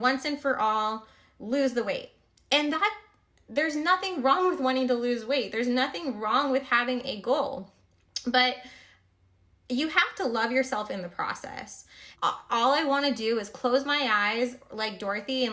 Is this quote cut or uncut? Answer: cut